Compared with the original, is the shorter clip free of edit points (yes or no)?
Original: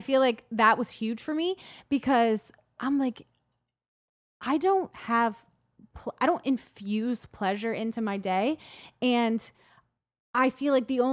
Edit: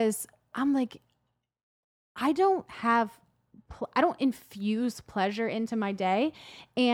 yes